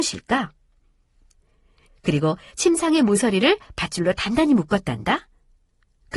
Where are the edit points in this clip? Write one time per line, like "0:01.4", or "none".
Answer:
0:01.9